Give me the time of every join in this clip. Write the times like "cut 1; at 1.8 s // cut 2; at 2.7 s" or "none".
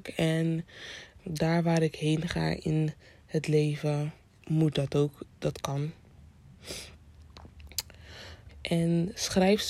cut 1; at 1.2 s // cut 2; at 8.5 s